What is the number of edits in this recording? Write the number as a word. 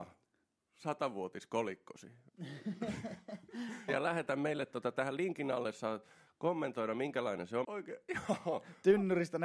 two